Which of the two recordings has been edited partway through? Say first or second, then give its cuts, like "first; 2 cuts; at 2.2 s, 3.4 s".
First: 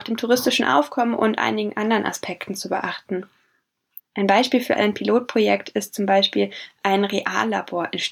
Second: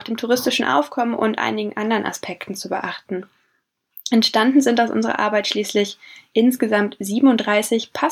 first; 1 cut; at 4.0 s